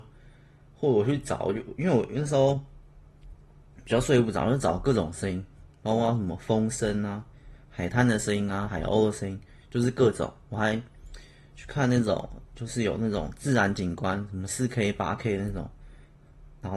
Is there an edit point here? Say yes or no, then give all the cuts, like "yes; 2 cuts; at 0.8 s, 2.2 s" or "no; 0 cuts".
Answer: no; 0 cuts